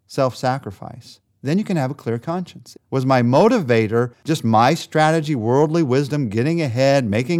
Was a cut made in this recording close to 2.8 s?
yes; 1 cut; at 2.8 s

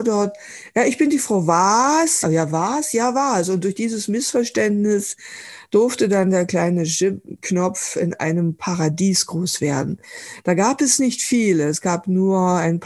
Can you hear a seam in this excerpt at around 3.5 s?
no; 1 cut; at 2.2 s

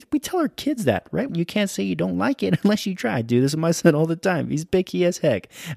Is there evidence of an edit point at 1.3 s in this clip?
yes; 1 cut; at 1.3 s

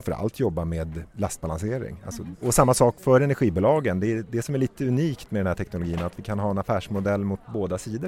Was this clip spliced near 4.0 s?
no; 1 cut; at 2.3 s

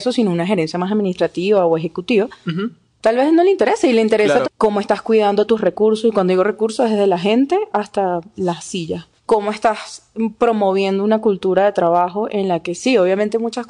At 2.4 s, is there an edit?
no; 2 cuts; at 4.4 s, 9.2 s

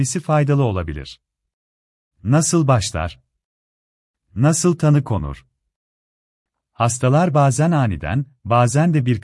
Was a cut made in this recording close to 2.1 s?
yes; 1 cut; at 2.1 s

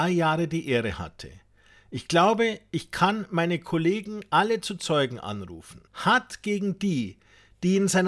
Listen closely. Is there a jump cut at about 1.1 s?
no; 1 cut; at 5.9 s

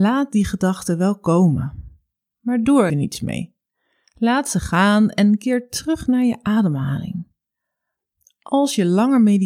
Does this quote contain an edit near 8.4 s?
no; 1 cut; at 2.9 s

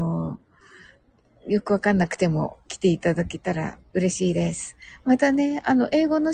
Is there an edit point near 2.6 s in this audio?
yes; 1 cut; at 2.6 s

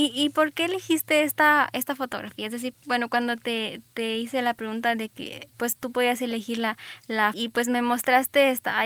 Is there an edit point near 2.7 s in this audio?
yes; 2 cuts; at 2.7 s, 7.3 s

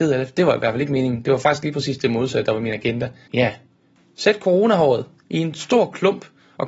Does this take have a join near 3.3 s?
yes; 1 cut; at 3.3 s

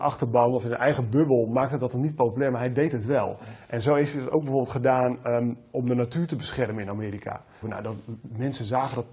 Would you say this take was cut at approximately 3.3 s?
no; 1 cut; at 7.6 s

